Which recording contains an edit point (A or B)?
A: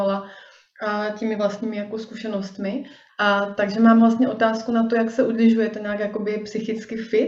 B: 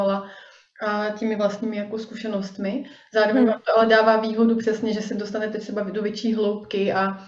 A